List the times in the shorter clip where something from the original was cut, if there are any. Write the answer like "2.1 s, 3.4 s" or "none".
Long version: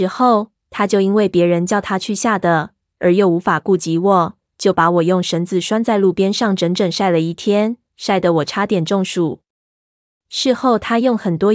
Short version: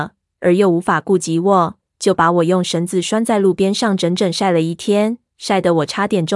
none